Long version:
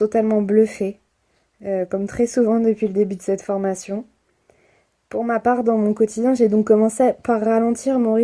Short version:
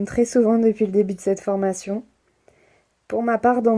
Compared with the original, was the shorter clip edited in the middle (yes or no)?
no